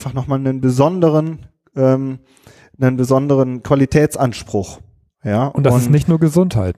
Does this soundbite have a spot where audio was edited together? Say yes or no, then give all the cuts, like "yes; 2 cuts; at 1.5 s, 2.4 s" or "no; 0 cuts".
no; 0 cuts